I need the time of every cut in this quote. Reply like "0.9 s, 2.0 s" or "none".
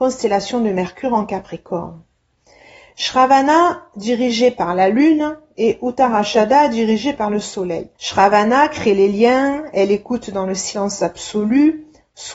7.9 s